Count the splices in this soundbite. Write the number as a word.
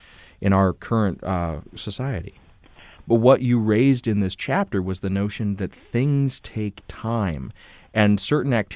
one